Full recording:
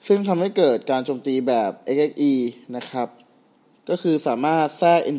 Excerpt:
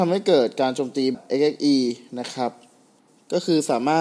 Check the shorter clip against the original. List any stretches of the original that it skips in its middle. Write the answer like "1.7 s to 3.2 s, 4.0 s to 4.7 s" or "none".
1.4 s to 1.7 s